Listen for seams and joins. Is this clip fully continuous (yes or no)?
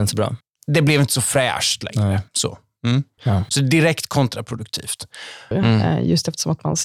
no